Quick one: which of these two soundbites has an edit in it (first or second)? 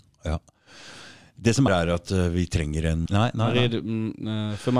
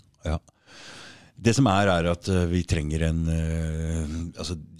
first